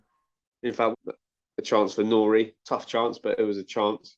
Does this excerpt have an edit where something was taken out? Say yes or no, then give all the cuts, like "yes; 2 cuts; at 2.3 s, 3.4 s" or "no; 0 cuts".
yes; 1 cut; at 0.9 s